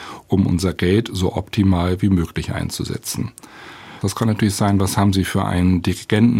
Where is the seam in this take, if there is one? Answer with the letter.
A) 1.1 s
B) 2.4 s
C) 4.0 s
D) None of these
C